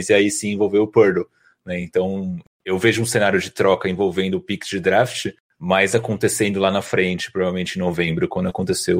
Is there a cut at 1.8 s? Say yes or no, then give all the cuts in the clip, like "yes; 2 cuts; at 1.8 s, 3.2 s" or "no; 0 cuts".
no; 0 cuts